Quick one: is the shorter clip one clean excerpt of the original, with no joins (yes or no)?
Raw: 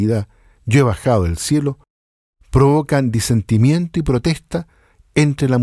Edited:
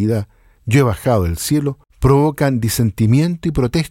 no